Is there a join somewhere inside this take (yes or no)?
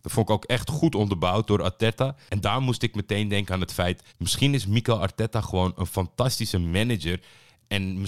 yes